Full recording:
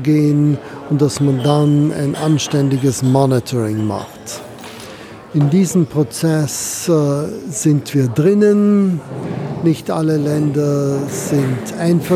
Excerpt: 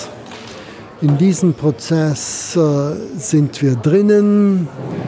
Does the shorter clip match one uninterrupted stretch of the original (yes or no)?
yes